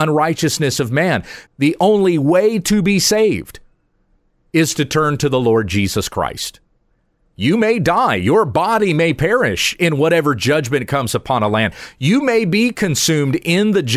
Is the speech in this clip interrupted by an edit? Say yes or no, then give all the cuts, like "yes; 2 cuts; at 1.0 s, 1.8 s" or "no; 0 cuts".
yes; 1 cut; at 1.5 s